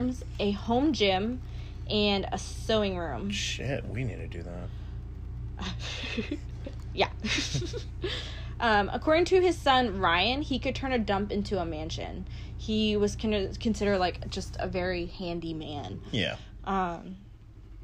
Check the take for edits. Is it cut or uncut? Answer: uncut